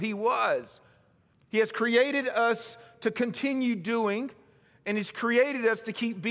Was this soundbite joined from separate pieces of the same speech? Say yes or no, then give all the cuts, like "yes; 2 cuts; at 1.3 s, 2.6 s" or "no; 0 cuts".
yes; 1 cut; at 1.3 s